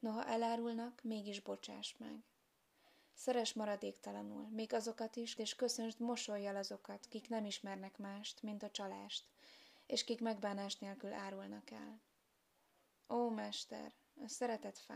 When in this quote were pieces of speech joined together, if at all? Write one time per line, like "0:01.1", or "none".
0:05.4